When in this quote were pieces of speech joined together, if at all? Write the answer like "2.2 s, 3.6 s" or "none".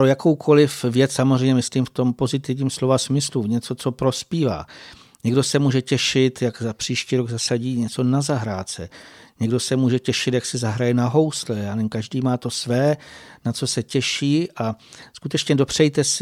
none